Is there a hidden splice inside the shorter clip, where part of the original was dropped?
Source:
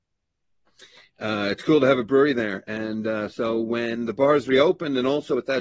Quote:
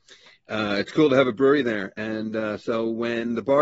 no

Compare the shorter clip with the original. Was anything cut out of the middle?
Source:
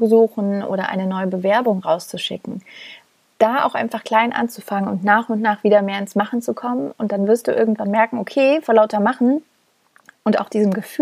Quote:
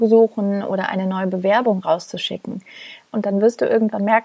yes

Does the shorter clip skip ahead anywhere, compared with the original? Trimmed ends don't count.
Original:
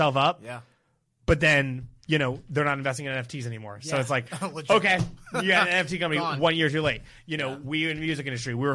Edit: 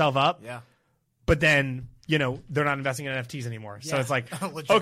no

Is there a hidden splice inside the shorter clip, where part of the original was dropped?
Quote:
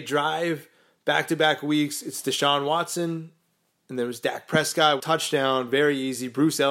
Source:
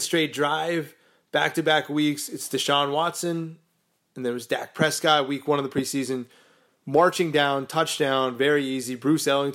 yes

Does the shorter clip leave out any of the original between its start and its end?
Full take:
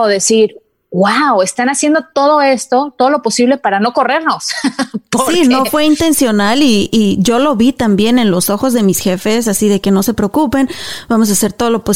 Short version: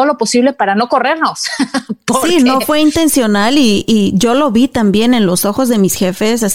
no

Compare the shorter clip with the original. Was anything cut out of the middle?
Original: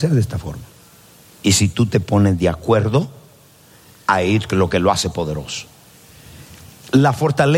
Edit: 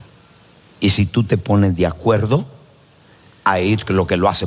no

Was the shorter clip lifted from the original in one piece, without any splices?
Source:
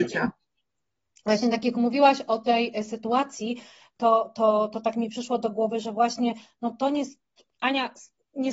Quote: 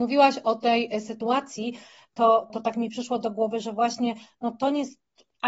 no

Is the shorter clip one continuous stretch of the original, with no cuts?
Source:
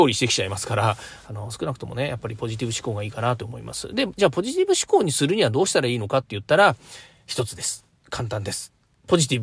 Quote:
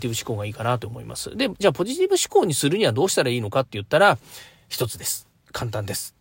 yes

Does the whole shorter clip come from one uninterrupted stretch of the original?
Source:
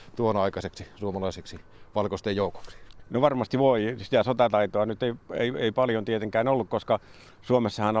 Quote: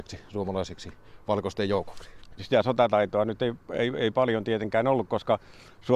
no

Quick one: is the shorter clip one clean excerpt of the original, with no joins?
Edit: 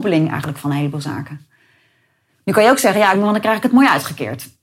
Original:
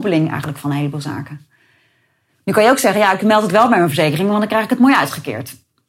no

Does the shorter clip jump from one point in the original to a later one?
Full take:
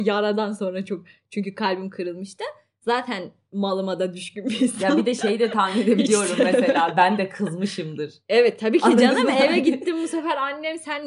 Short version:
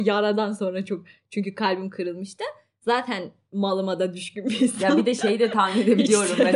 no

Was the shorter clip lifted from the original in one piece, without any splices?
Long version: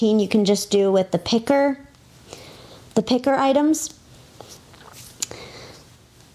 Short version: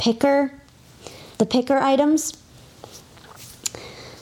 no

